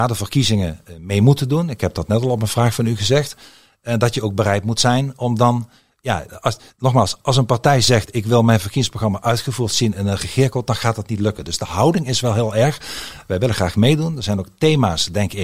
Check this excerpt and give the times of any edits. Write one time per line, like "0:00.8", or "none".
none